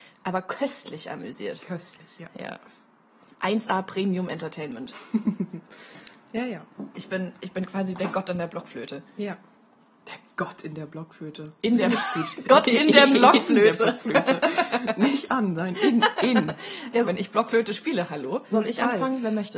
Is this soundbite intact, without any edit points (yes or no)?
no